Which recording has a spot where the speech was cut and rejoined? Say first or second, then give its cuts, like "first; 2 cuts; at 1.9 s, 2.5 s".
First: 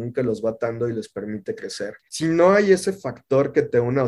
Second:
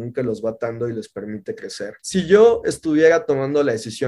first; 1 cut; at 2.0 s